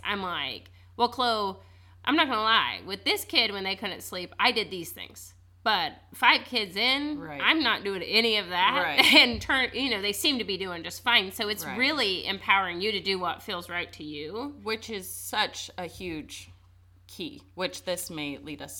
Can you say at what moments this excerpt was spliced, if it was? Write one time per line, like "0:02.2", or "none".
none